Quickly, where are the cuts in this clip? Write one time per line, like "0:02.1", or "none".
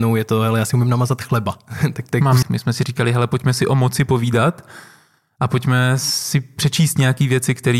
0:02.4